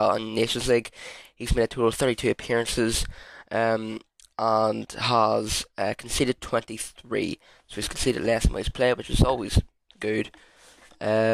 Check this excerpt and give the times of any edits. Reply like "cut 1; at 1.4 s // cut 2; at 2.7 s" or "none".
none